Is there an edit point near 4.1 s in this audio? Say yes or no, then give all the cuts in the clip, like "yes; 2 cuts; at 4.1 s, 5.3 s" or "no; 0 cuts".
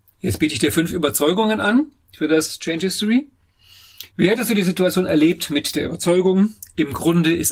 yes; 1 cut; at 4.1 s